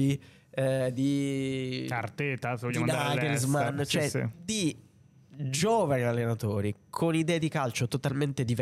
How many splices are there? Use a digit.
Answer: 0